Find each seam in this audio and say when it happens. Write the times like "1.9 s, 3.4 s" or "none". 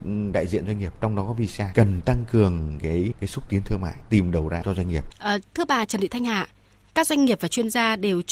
5.1 s